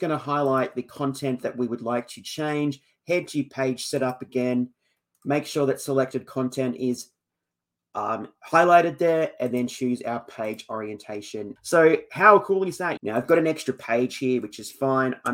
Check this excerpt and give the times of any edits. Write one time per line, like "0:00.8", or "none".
0:11.6
0:13.0